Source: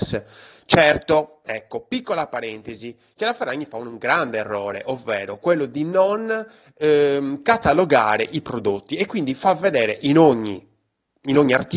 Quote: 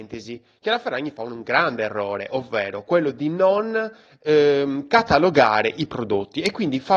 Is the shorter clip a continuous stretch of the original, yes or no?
yes